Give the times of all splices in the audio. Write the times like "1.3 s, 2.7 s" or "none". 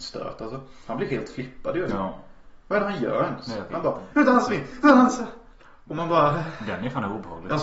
4.1 s